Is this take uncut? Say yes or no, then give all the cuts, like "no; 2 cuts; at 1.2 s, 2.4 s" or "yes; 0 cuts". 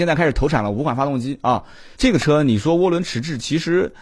no; 1 cut; at 1.9 s